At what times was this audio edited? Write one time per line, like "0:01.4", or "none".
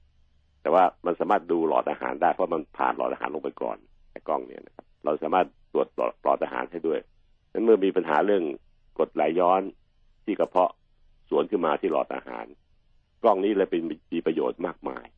0:04.9